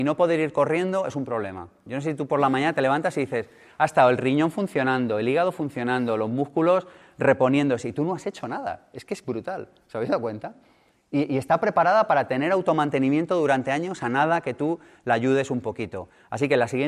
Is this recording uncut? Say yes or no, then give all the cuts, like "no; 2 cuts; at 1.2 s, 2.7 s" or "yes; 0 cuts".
no; 1 cut; at 1.9 s